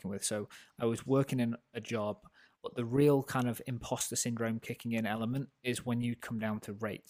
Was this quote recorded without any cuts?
no; 1 cut; at 2.5 s

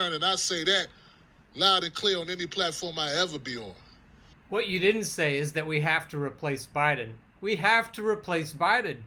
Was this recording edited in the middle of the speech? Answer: yes; 1 cut; at 7.4 s

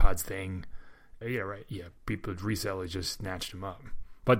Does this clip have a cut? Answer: yes; 1 cut; at 1.2 s

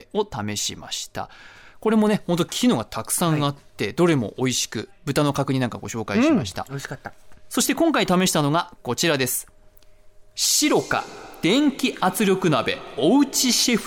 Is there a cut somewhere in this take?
no; 0 cuts

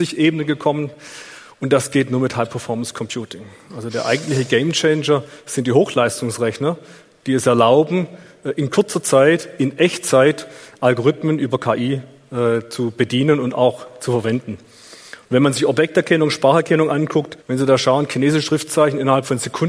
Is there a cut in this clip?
yes; 1 cut; at 17.4 s

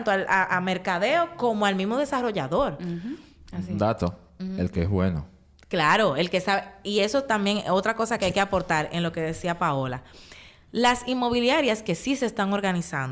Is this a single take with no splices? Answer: yes; 0 cuts

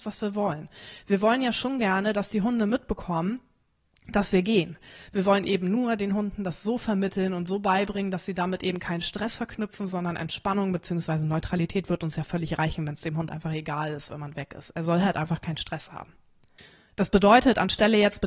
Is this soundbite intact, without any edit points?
yes; 0 cuts

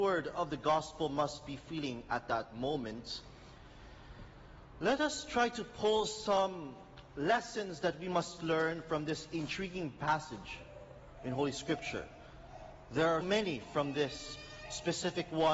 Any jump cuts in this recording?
yes; 1 cut; at 13.2 s

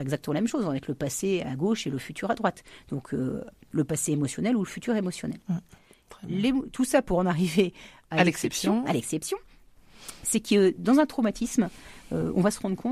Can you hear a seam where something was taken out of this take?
no; 0 cuts

